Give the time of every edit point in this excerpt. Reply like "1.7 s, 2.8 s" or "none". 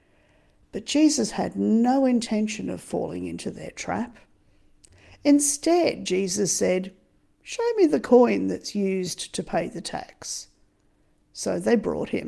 none